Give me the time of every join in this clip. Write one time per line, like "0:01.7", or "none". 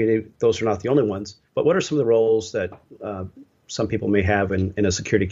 0:01.5